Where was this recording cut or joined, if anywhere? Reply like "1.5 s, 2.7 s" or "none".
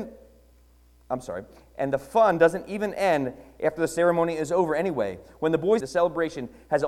5.8 s